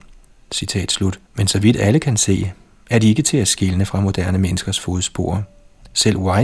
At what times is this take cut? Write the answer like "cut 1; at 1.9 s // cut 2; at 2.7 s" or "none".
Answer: cut 1; at 1.3 s